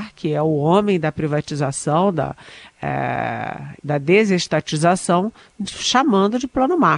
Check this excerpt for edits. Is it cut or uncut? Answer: cut